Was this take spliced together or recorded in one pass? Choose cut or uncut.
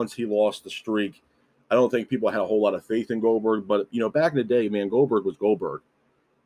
uncut